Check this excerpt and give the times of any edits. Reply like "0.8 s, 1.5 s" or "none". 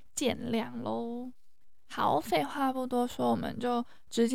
none